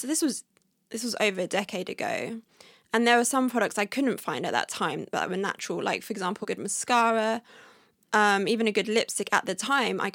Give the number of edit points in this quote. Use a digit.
1